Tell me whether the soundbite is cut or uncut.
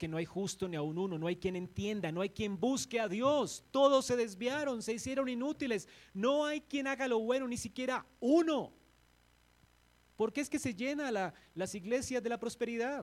uncut